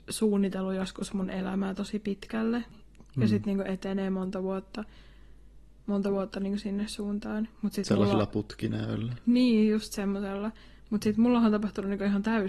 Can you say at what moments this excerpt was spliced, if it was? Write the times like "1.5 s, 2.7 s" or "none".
2.7 s

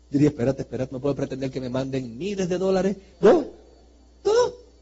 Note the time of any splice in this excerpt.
0.9 s, 3.1 s

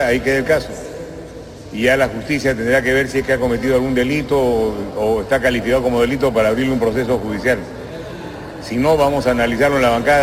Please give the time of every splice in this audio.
none

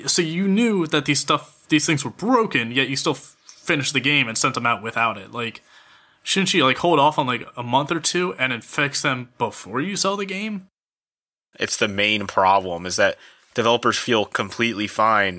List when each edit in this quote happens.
11.5 s

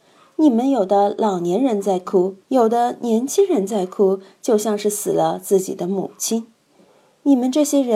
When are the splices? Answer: 2.4 s

